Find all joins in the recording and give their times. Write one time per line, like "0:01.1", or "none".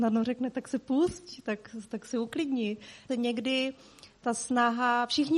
0:03.1